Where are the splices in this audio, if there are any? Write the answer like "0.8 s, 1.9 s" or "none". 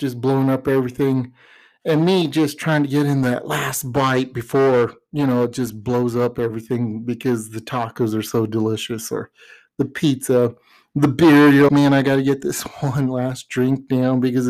11.7 s